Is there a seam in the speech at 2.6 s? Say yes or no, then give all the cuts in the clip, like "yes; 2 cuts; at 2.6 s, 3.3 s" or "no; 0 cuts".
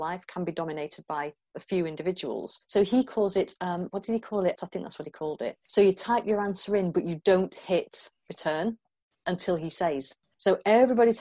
no; 1 cut; at 4.5 s